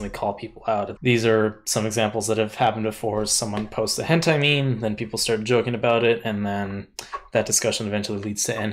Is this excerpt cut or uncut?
cut